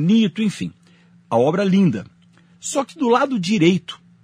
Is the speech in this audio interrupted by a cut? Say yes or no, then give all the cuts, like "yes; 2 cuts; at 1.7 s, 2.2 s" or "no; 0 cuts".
no; 0 cuts